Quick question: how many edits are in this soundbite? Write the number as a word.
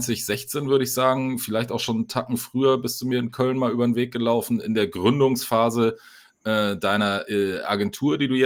zero